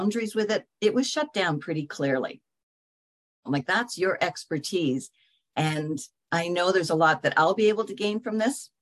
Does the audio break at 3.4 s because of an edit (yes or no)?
yes